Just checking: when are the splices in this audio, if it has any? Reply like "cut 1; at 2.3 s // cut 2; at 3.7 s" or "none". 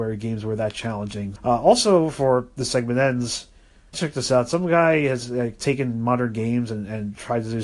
cut 1; at 1.4 s // cut 2; at 3.9 s